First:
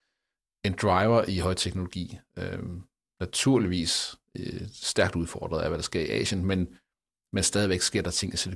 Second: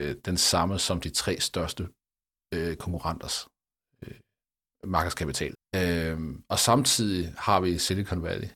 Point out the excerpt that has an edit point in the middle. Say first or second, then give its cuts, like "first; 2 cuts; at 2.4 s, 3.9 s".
second; 1 cut; at 5.5 s